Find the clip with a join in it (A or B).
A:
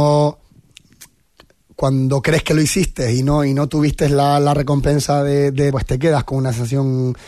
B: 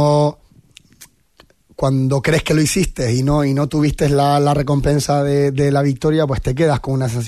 A